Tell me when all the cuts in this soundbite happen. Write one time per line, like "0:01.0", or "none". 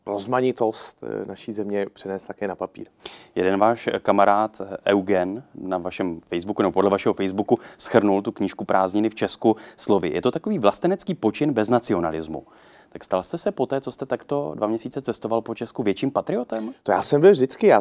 none